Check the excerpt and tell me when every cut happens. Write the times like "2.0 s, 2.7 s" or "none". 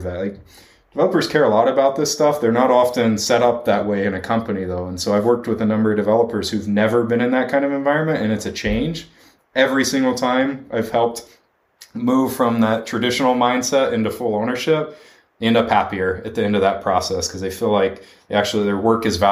none